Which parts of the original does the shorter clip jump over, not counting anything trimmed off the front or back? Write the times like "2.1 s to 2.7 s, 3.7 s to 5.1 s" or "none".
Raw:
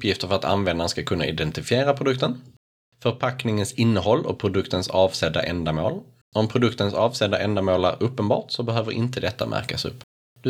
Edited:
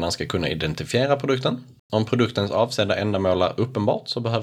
2.6 s to 6.2 s